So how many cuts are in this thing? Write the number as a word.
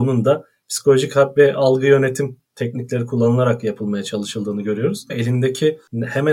one